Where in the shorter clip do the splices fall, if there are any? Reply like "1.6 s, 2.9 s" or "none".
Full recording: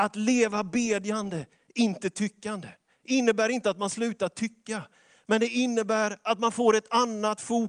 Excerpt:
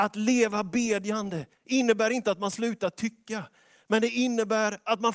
1.5 s